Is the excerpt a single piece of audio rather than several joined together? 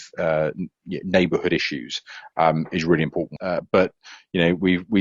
no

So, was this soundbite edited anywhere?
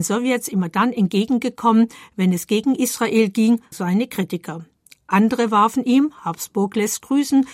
yes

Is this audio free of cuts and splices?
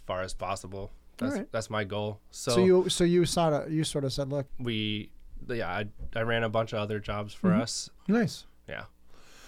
no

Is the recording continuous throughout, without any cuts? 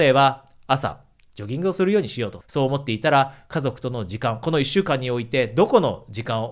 no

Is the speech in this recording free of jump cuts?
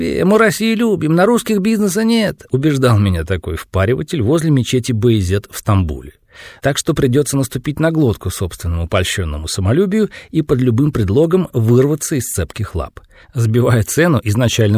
no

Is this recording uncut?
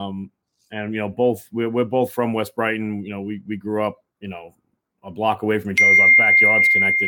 no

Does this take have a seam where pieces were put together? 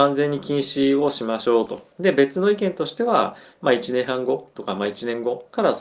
yes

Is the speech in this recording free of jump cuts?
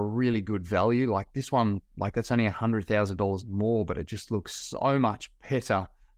yes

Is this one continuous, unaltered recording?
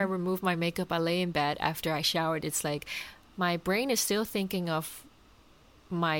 yes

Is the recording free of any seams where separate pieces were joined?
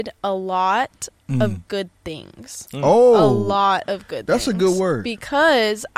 yes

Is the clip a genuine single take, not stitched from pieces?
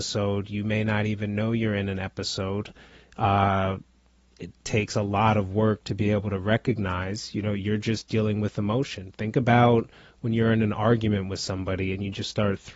yes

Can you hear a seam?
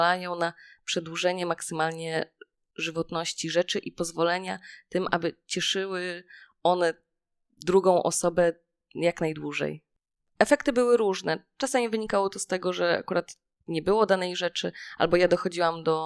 yes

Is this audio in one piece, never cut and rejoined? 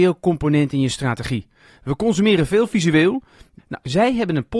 no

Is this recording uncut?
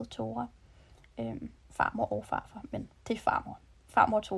no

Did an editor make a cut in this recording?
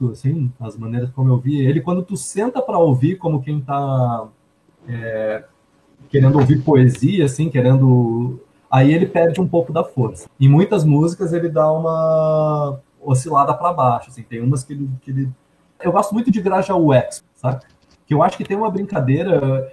yes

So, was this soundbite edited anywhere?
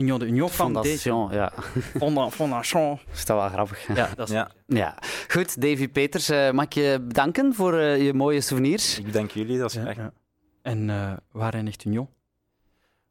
yes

